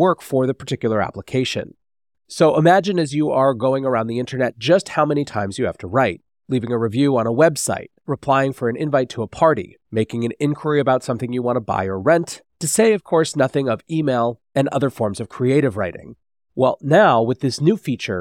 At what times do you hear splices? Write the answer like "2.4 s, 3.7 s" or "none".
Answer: 2.1 s